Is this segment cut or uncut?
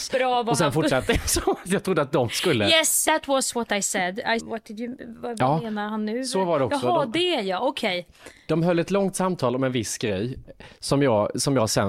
cut